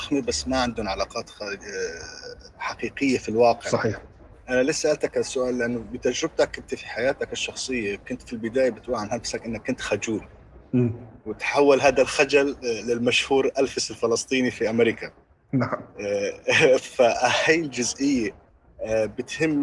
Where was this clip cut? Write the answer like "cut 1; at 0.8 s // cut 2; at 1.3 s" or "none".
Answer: cut 1; at 14.5 s